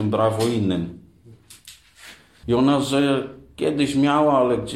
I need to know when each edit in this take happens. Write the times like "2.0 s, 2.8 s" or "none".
2.4 s